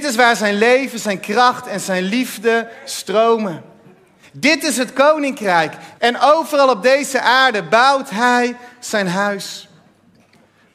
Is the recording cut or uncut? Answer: cut